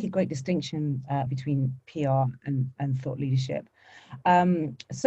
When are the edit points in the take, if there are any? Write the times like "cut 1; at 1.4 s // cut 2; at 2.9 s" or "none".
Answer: cut 1; at 1.3 s